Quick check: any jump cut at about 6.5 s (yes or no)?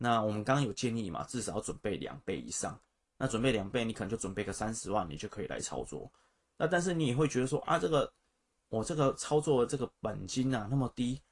no